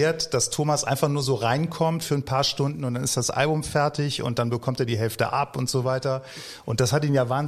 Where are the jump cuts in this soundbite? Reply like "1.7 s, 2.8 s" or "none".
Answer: none